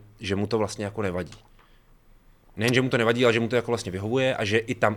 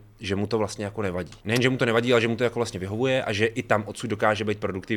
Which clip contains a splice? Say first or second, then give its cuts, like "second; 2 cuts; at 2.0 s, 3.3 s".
second; 1 cut; at 1.4 s